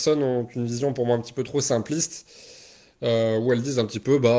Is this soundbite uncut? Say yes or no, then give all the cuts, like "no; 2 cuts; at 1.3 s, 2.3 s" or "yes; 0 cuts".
yes; 0 cuts